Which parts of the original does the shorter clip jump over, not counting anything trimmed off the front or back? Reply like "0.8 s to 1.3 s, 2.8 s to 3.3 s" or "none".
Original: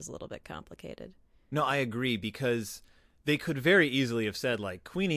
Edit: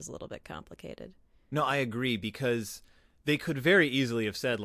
none